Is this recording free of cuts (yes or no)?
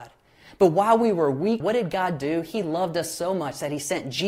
no